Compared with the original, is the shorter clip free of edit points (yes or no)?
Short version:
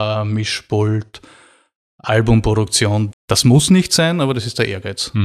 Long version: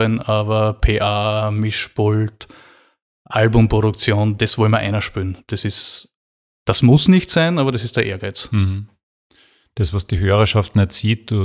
no